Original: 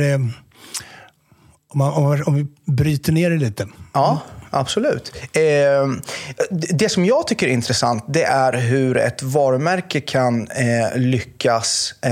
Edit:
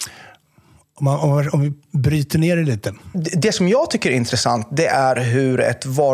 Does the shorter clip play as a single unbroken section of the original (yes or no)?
no